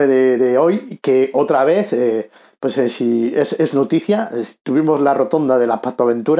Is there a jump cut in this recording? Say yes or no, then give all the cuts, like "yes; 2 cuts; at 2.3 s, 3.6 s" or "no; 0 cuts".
no; 0 cuts